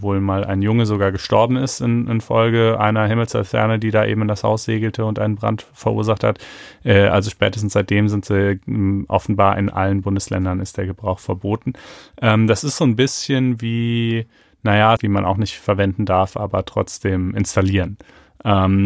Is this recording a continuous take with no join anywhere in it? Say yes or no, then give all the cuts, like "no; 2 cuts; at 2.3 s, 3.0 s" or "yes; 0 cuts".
no; 1 cut; at 15.0 s